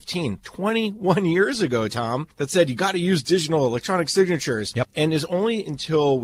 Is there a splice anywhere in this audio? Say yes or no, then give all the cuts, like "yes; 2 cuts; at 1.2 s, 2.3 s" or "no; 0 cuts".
no; 0 cuts